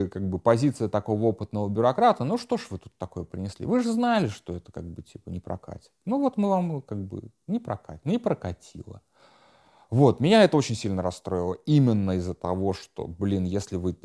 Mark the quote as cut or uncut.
uncut